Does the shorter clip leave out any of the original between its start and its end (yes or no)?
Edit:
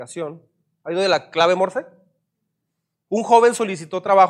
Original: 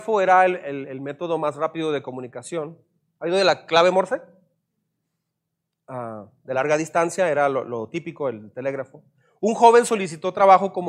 yes